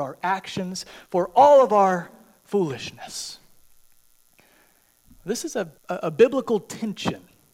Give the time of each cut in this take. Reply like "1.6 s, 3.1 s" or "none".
5.8 s